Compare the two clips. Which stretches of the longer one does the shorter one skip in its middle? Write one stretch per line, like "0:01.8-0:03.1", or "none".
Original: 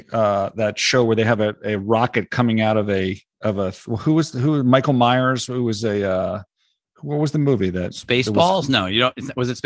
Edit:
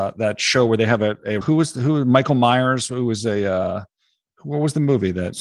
0:01.8-0:04.0